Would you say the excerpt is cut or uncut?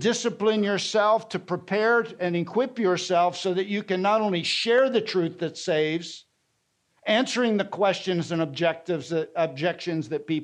uncut